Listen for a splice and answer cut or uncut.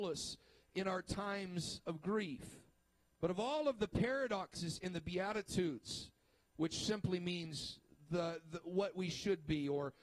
uncut